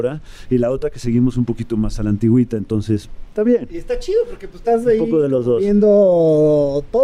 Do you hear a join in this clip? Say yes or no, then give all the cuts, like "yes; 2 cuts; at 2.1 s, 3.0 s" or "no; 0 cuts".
no; 0 cuts